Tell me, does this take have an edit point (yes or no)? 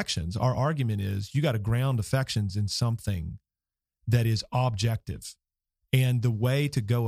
no